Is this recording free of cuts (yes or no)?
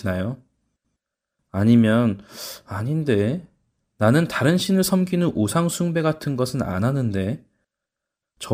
no